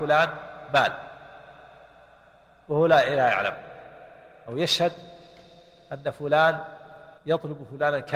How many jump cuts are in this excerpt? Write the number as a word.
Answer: one